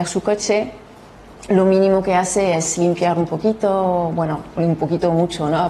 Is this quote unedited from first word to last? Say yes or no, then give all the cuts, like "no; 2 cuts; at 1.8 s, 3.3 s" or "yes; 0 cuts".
yes; 0 cuts